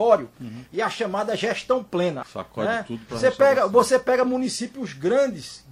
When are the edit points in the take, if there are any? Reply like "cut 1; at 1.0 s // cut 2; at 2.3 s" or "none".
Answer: cut 1; at 2.2 s